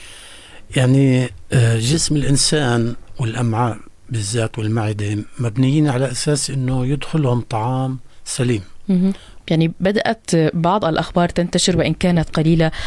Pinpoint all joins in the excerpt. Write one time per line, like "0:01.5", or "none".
0:09.4